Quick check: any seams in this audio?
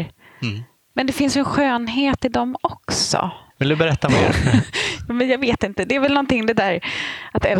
yes; 1 cut; at 3.5 s

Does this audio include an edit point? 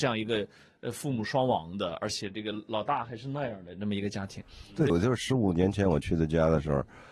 yes; 1 cut; at 4.9 s

